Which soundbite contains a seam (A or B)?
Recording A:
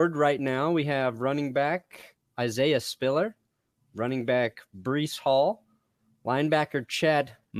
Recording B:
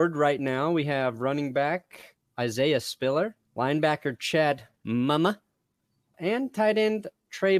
B